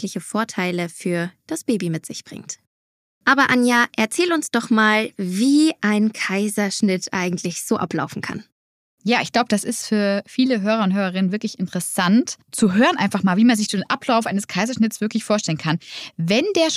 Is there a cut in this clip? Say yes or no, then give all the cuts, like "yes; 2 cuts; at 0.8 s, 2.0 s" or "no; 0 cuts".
no; 0 cuts